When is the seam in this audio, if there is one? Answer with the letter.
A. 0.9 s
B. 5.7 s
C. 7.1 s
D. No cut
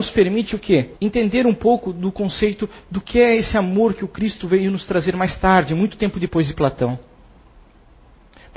A